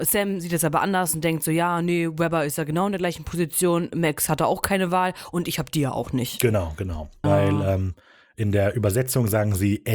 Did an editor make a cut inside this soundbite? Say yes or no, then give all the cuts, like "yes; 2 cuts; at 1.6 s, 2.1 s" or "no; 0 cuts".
yes; 1 cut; at 7.2 s